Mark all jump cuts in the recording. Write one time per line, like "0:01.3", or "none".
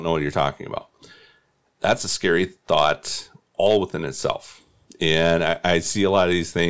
none